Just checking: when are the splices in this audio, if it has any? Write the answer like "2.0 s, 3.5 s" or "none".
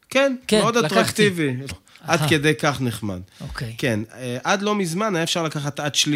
1.7 s